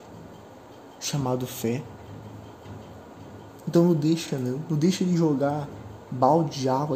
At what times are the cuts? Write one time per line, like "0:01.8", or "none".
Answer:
none